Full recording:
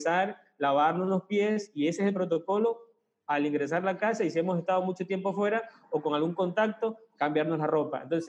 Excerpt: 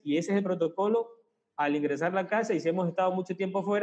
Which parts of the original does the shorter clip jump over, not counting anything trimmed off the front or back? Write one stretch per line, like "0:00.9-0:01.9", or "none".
none